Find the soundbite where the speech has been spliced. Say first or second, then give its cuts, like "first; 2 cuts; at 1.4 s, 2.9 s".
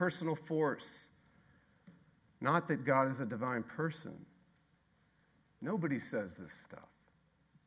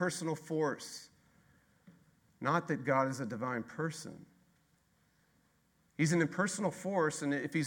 first; 1 cut; at 5.4 s